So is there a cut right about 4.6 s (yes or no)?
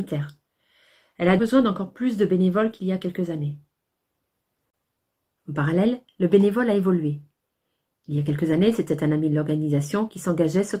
no